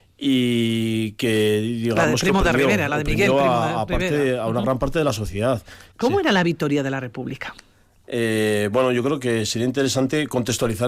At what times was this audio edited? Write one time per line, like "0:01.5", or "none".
0:05.9